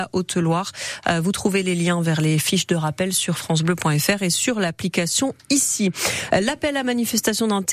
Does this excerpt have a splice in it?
no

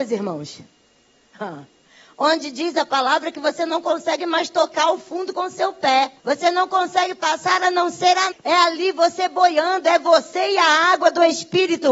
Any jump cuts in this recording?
yes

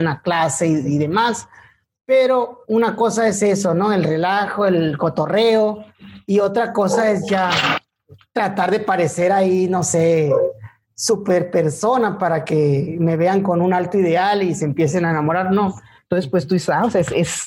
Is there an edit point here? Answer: yes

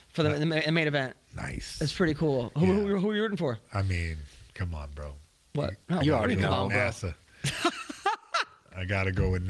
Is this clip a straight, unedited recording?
yes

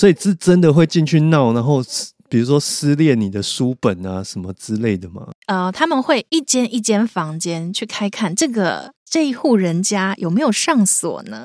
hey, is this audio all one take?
no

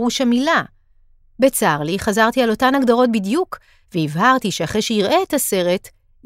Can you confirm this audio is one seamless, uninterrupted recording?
yes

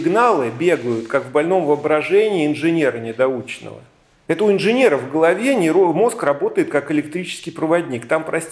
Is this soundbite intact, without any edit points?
no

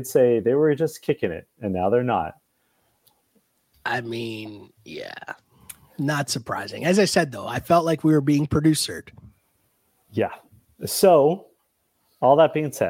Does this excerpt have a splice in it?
yes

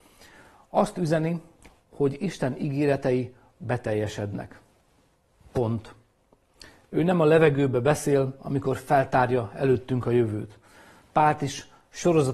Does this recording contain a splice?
no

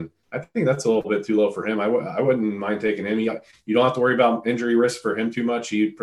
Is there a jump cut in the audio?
no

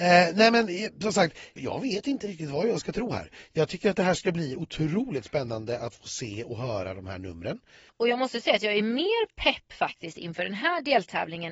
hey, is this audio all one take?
no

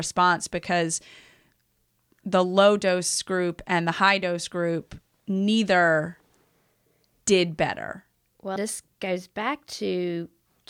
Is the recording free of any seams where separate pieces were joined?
no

